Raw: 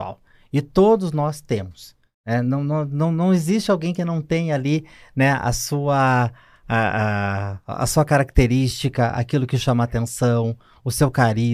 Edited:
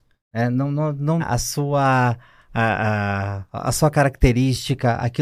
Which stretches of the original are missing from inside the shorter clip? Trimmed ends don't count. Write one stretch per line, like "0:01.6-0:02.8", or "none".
0:03.1-0:05.3